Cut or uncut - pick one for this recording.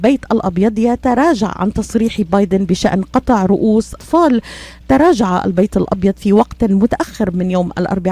cut